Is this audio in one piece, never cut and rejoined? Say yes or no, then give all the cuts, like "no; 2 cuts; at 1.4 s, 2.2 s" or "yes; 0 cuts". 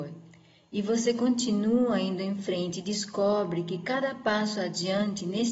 yes; 0 cuts